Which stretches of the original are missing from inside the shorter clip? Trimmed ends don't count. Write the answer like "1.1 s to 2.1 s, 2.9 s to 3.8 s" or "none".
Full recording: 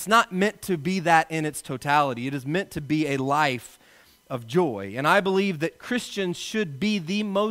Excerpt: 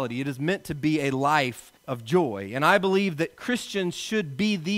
3.8 s to 4.2 s